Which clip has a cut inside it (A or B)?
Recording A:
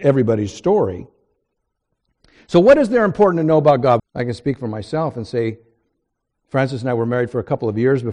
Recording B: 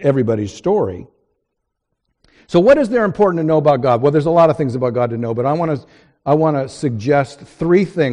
A